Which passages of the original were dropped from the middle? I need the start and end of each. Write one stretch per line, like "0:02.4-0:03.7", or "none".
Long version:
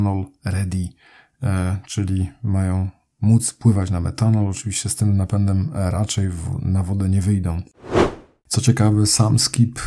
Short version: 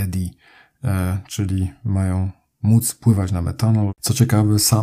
0:04.5-0:08.4